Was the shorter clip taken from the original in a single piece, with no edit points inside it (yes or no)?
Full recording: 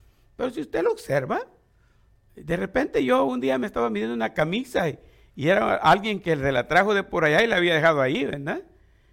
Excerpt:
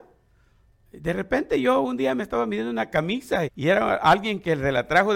no